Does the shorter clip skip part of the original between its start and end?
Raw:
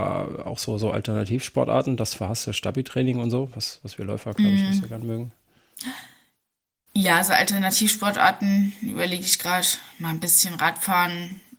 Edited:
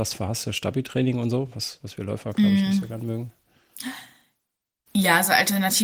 no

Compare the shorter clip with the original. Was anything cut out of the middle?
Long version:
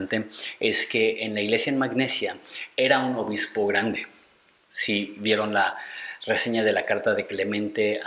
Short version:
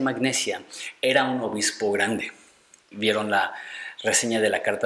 yes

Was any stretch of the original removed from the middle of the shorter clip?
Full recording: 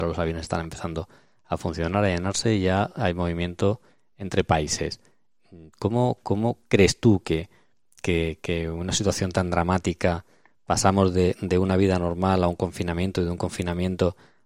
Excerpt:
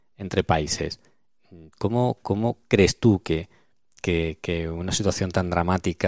no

